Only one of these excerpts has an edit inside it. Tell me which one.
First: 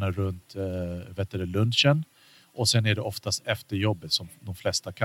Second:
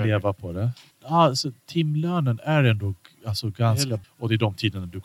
second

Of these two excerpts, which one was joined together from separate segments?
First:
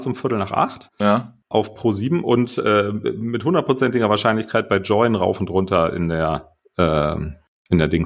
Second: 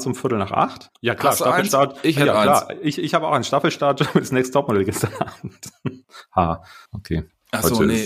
second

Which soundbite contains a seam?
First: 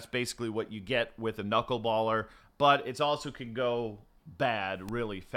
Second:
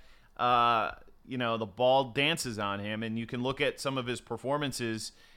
first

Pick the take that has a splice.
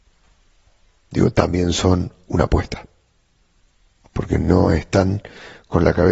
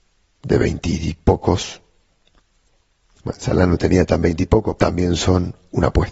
second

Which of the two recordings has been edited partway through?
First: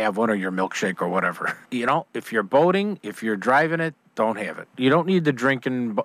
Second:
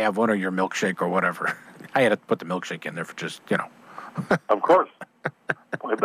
first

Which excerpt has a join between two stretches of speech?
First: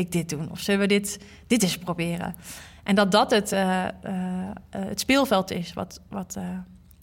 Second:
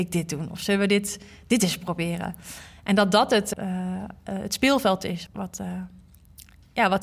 second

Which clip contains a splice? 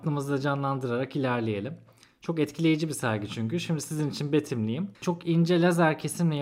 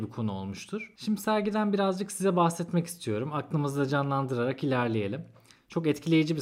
first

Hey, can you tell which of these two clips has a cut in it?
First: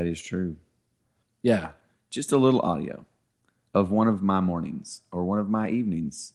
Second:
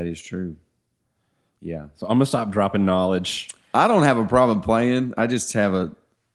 first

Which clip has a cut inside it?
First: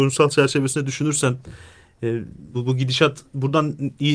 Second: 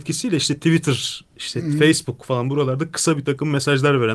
first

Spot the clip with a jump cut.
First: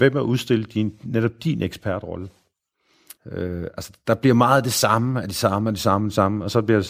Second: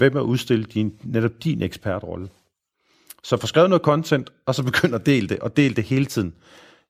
first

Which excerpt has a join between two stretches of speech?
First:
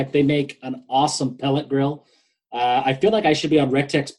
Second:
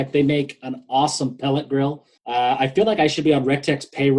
second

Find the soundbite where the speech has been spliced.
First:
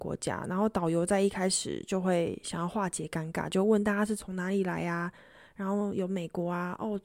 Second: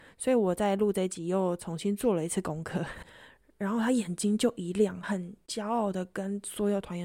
second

